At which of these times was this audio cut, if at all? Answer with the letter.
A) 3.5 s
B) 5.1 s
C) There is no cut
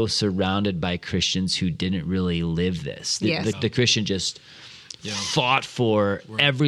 A